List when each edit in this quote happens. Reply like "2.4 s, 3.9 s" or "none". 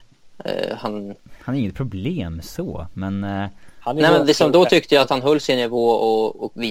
none